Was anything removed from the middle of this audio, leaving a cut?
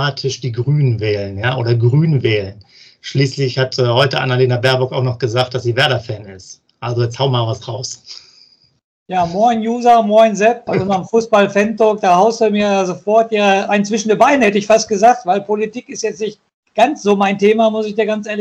yes; 1 cut; at 10.7 s

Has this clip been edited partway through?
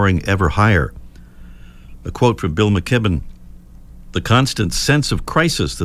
no; 0 cuts

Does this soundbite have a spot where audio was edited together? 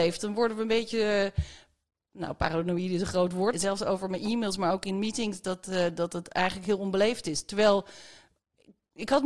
yes; 1 cut; at 3.5 s

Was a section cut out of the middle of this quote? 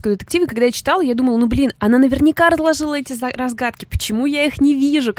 yes; 1 cut; at 1.7 s

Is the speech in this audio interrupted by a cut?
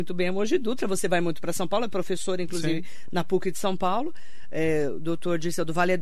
no; 0 cuts

